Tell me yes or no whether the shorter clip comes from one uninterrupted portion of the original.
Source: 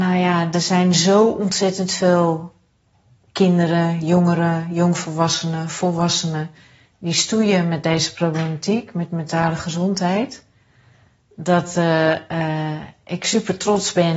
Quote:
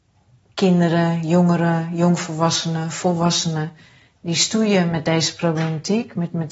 yes